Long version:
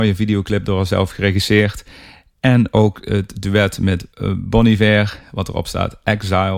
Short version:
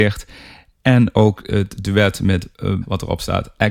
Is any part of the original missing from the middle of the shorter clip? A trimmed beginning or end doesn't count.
yes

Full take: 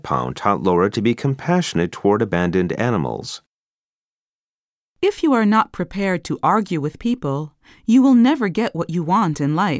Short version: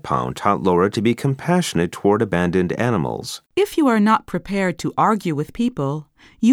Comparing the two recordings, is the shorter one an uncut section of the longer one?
no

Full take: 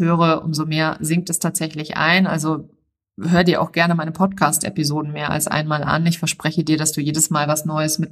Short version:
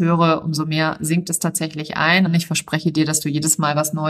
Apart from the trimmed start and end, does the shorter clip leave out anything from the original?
yes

